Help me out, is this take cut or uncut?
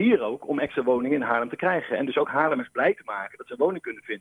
uncut